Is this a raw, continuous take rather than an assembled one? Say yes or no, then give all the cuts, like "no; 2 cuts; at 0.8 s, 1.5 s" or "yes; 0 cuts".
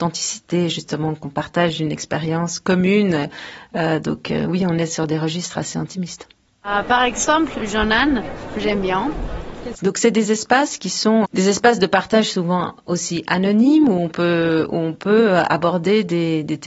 no; 2 cuts; at 9.7 s, 11.2 s